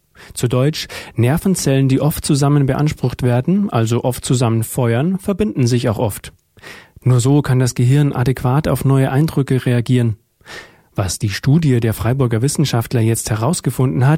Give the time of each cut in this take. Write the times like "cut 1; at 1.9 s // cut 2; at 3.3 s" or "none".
cut 1; at 7.0 s // cut 2; at 10.8 s